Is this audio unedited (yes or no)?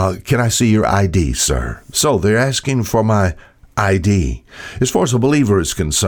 yes